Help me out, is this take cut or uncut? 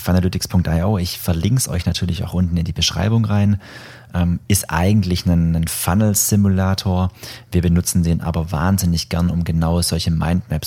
uncut